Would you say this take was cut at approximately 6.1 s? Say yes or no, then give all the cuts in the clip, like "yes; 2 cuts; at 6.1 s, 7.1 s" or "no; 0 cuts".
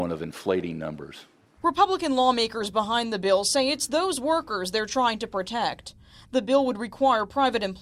no; 1 cut; at 1.6 s